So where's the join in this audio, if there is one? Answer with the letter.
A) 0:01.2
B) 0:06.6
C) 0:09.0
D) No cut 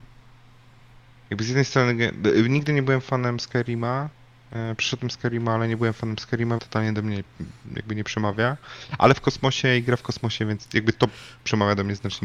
B